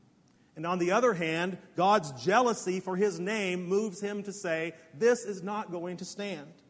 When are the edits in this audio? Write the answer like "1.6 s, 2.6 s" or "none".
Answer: none